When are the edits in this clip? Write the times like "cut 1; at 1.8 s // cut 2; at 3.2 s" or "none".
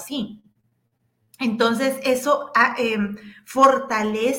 none